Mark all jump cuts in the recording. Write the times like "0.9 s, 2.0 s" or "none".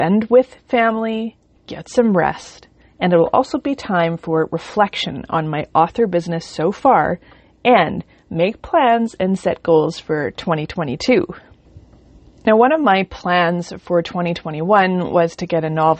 none